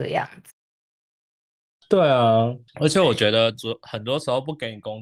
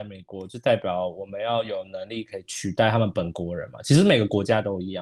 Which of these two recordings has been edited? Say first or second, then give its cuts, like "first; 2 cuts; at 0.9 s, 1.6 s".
first; 1 cut; at 2.7 s